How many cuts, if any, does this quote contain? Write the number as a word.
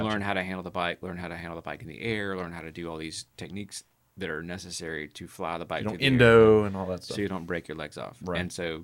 zero